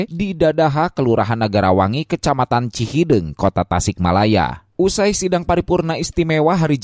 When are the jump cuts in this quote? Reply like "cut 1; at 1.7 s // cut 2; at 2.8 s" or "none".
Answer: cut 1; at 4.7 s